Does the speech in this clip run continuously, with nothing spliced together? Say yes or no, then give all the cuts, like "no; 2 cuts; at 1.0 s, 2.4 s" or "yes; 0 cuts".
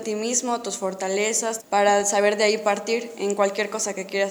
no; 1 cut; at 1.6 s